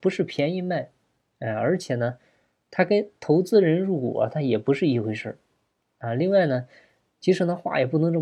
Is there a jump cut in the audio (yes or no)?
yes